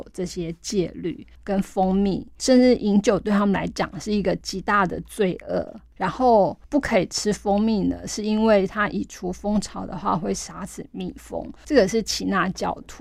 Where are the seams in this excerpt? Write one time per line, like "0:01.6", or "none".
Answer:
0:01.4